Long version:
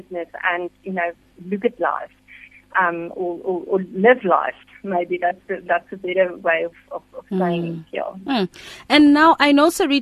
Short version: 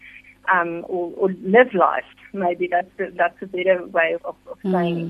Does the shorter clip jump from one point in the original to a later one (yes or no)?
yes